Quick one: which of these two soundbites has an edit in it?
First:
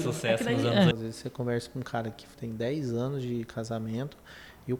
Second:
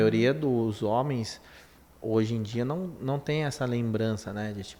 first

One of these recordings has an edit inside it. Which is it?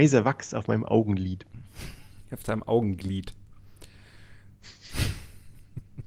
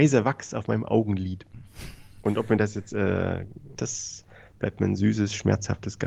second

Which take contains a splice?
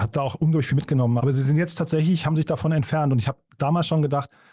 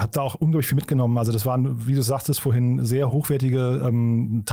first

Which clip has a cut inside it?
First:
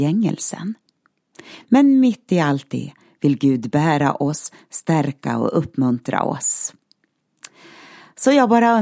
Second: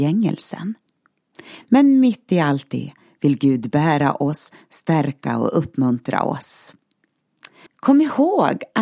second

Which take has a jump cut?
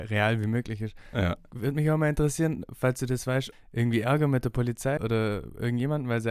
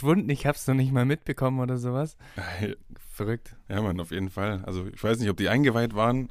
first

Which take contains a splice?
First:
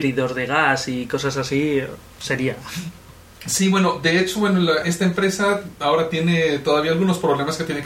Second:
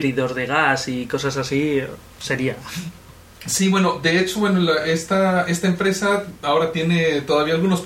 first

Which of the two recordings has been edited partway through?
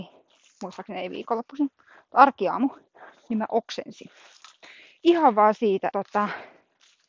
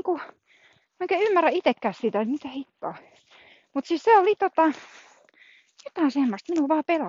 first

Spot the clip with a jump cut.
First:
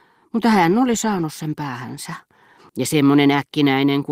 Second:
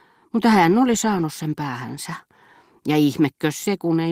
first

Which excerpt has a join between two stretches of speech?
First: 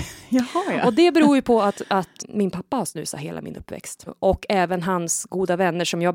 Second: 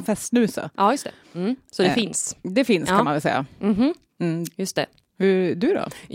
first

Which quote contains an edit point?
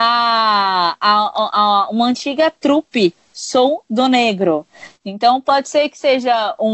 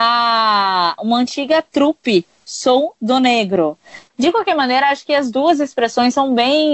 second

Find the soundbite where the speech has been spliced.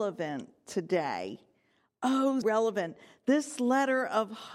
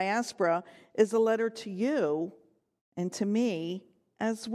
first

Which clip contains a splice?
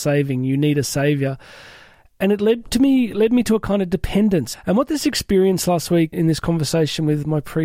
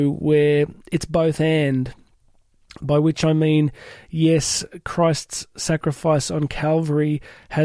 first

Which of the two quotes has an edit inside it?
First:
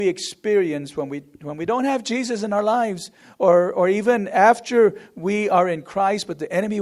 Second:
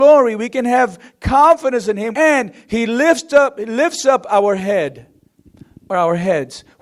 second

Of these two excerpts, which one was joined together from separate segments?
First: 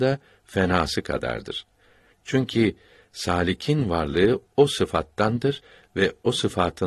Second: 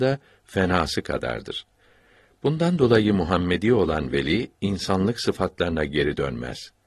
first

